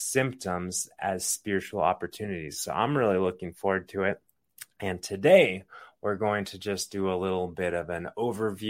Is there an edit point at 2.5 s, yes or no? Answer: no